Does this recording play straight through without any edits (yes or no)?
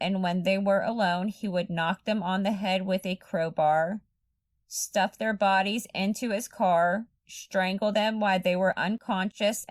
yes